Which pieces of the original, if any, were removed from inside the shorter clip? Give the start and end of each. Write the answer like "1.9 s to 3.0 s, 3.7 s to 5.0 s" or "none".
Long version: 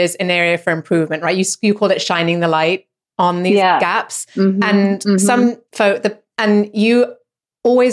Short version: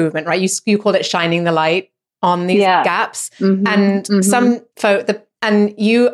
none

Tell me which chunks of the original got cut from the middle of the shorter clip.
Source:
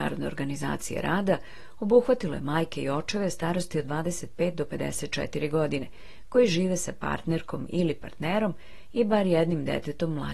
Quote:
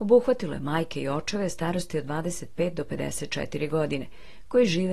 none

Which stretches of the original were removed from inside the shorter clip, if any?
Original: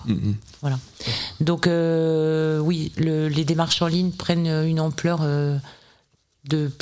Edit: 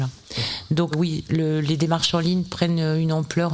1.6 s to 2.6 s

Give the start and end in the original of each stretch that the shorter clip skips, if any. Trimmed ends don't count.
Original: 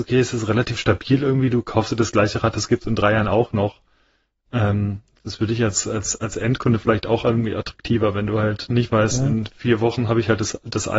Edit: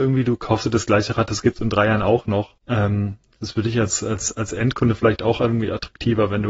3.8 s to 4.4 s

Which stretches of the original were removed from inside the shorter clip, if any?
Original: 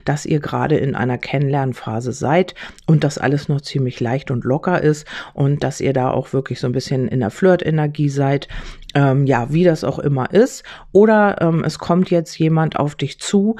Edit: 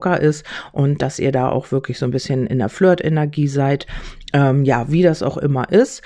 none

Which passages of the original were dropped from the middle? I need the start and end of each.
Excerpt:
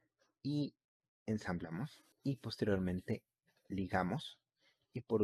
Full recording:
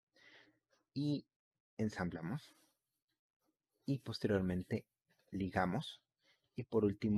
2.6 s to 3.7 s

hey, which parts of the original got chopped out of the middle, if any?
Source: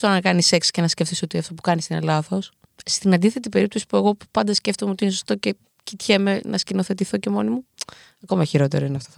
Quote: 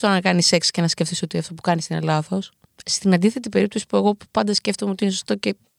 none

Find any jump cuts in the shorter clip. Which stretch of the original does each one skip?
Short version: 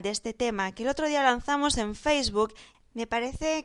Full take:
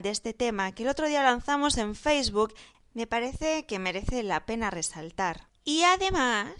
none

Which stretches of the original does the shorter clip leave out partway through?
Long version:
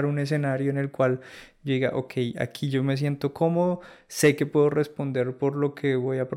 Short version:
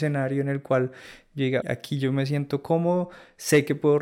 1.9 s to 2.3 s

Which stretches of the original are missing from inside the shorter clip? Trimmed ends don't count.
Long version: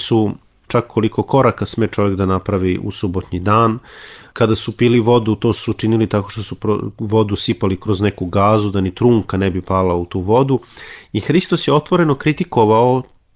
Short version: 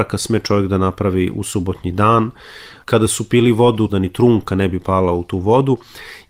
5.4 s to 8.7 s

